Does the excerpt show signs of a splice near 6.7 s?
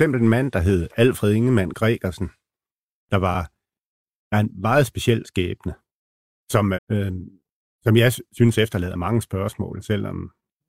yes; 1 cut; at 6.7 s

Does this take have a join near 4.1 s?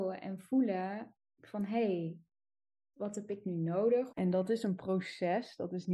yes; 2 cuts; at 2.9 s, 4.1 s

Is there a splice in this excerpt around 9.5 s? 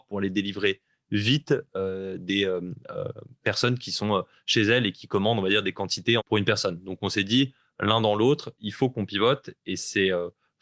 no; 1 cut; at 6.2 s

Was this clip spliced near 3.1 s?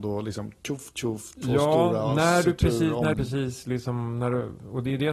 yes; 1 cut; at 3.1 s

